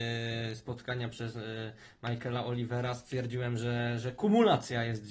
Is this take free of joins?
yes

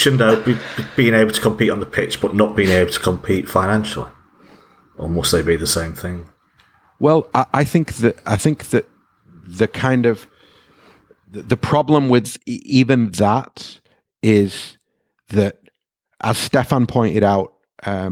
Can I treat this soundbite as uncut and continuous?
yes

